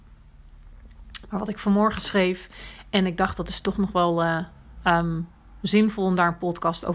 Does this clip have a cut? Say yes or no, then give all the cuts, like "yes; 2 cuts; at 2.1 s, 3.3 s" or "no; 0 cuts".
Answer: no; 0 cuts